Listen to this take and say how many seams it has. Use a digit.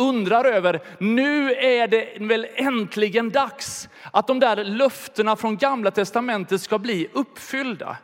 0